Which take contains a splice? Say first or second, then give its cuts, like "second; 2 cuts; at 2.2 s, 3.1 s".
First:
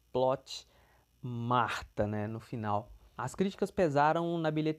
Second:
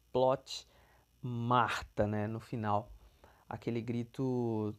first; 1 cut; at 3.2 s